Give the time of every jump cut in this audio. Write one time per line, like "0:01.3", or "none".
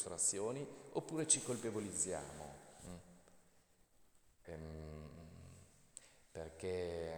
0:04.4